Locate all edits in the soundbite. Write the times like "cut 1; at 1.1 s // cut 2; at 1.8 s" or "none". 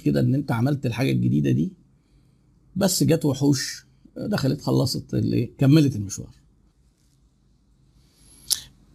none